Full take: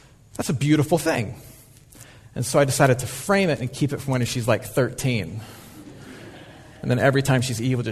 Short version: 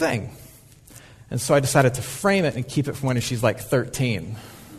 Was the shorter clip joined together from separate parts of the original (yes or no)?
no